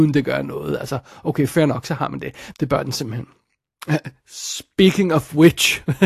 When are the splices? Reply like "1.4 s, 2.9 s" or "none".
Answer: 2.5 s

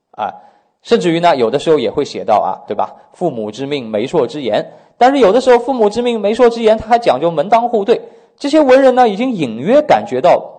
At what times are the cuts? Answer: 2.7 s

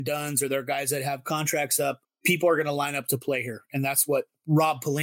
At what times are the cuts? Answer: 2.0 s

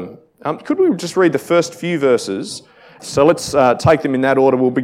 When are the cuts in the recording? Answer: 3.0 s

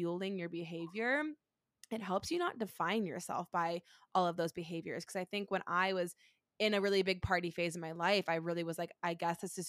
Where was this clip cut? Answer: none

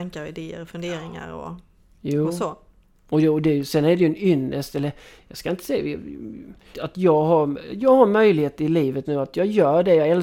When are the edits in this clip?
6.7 s, 9.0 s

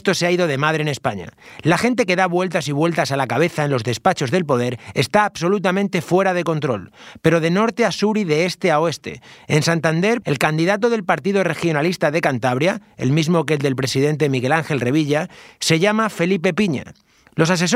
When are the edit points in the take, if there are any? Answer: 10.2 s

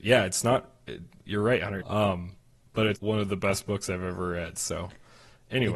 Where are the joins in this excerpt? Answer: 1.8 s, 2.9 s

